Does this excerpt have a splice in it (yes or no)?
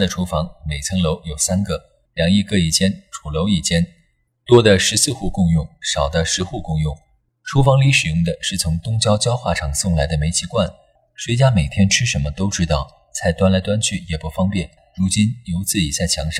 yes